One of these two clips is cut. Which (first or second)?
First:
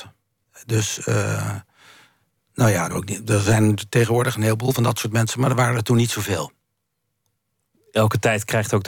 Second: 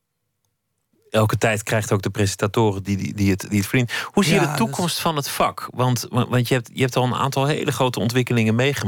first